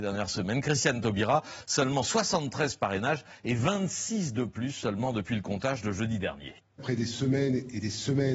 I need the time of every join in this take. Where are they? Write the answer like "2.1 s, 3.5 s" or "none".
6.6 s